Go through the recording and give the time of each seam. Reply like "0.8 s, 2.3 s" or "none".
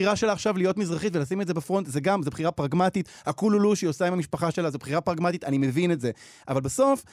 none